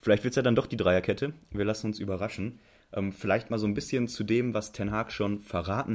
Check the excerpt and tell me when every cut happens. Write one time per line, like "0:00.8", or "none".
none